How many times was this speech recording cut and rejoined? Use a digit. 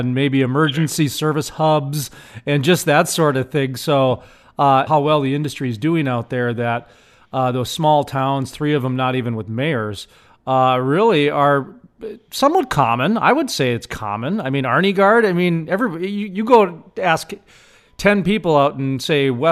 1